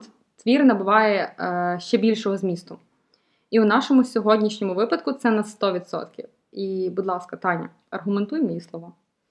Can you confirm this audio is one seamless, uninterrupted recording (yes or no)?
yes